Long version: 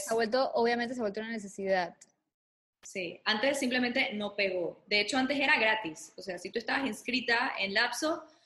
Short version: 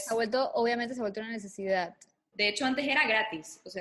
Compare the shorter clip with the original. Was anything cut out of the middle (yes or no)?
yes